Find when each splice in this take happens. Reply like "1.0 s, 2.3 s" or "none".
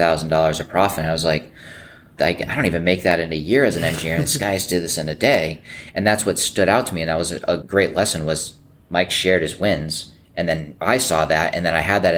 2.2 s